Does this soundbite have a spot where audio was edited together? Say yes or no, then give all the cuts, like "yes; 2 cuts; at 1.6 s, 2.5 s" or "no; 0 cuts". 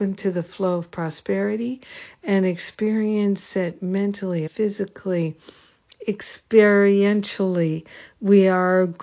yes; 1 cut; at 4.5 s